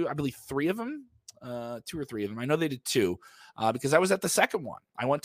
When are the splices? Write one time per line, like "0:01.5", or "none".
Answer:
none